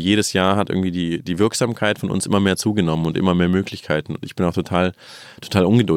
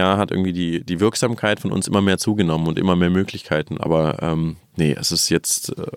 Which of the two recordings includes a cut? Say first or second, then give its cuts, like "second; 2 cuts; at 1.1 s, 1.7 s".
second; 1 cut; at 3.8 s